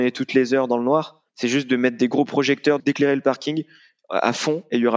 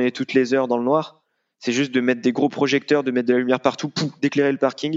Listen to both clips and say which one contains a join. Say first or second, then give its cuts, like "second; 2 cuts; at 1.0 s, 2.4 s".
first; 2 cuts; at 1.3 s, 2.8 s